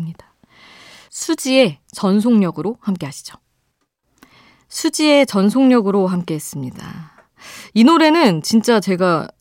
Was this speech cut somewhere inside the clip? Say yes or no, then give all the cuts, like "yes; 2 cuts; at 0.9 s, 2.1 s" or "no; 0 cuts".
no; 0 cuts